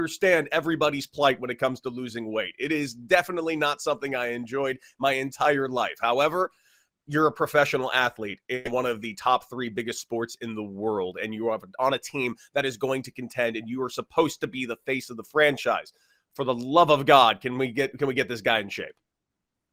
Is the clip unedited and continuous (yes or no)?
yes